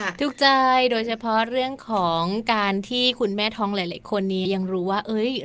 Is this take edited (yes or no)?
yes